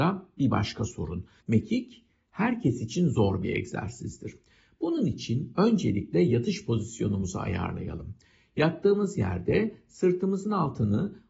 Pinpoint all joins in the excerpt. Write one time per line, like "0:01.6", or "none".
0:01.4